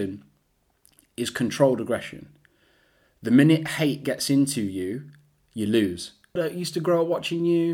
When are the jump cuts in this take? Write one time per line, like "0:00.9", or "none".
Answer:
0:06.4